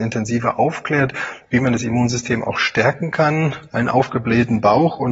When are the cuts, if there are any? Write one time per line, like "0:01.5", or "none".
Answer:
0:03.7